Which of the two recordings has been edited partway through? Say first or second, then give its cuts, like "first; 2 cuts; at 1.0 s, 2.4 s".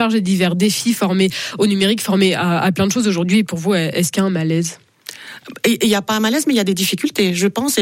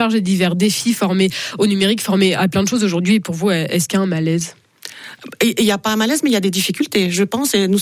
second; 1 cut; at 2.4 s